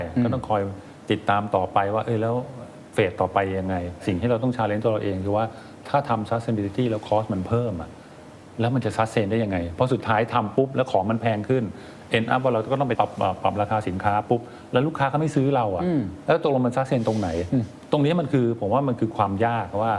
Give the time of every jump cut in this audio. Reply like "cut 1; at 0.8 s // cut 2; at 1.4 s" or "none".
cut 1; at 12.9 s